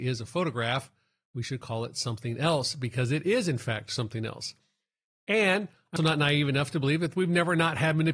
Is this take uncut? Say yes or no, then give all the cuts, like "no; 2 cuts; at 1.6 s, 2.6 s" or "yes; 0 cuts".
no; 1 cut; at 6.0 s